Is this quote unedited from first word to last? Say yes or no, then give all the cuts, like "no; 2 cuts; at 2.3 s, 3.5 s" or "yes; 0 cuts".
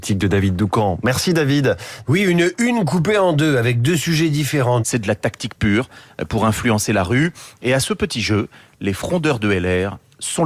no; 2 cuts; at 2.0 s, 4.8 s